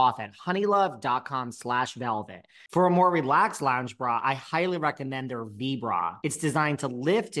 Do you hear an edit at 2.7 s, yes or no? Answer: yes